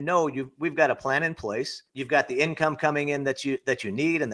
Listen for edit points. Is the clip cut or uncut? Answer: cut